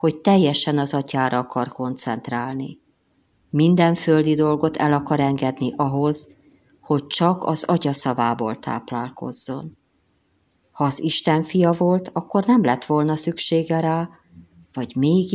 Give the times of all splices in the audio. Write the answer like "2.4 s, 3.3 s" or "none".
10.6 s